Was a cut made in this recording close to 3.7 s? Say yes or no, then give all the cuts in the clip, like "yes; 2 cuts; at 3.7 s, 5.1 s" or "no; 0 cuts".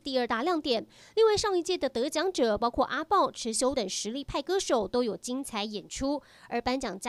yes; 1 cut; at 3.7 s